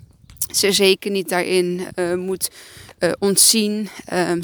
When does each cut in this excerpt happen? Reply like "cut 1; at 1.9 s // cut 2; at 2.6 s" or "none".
none